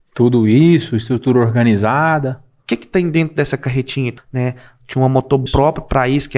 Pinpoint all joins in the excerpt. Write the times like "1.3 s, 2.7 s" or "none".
4.2 s, 5.5 s